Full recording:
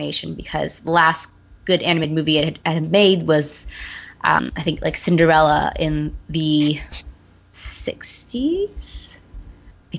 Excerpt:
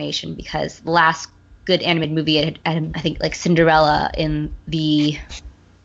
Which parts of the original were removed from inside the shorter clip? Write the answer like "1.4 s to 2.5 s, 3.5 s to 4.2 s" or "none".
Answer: 2.9 s to 4.5 s